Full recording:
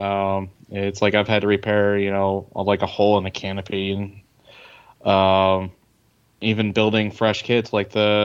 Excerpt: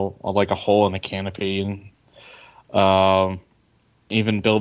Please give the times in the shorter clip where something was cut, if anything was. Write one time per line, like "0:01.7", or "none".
none